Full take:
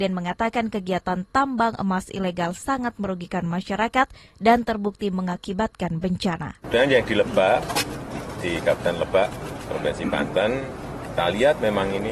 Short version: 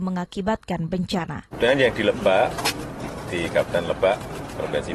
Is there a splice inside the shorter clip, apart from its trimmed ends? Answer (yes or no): no